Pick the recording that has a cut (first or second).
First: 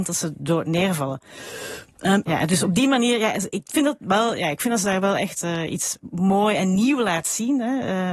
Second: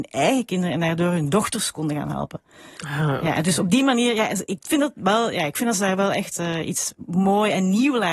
first